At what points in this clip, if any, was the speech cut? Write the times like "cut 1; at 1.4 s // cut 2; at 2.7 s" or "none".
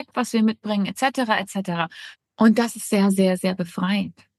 cut 1; at 2.1 s